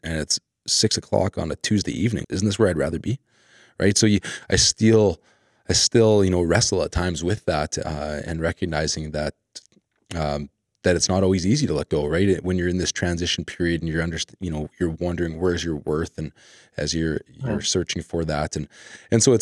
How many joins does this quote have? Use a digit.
1